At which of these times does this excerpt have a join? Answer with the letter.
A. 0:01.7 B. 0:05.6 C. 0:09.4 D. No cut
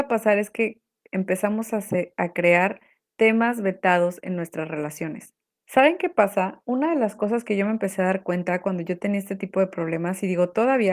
B